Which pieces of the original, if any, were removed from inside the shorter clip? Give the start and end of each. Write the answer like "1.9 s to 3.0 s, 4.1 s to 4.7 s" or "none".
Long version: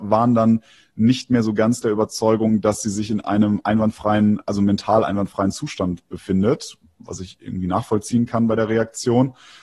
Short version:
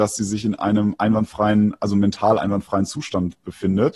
none